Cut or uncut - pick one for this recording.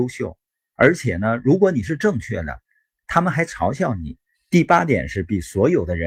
cut